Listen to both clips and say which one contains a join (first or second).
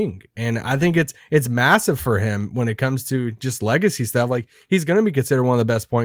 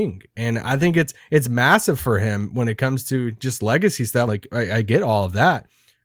second